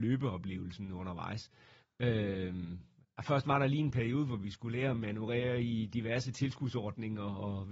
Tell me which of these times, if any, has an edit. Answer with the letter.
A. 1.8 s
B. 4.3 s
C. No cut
A